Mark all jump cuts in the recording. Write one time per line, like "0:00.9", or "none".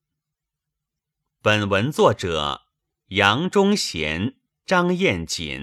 none